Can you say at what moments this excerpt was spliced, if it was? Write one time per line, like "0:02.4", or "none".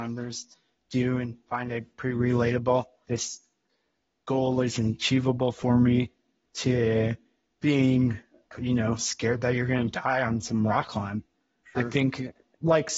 0:03.0